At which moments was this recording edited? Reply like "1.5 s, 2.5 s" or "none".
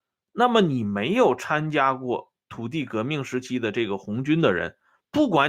none